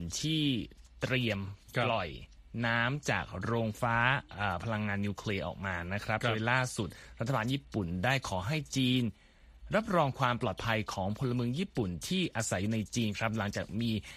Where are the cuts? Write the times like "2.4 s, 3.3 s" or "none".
3.7 s